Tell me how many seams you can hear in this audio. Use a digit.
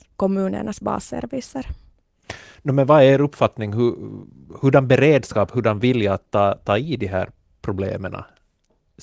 0